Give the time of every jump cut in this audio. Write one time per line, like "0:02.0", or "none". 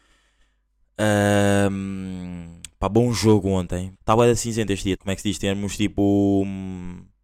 0:03.9
0:04.9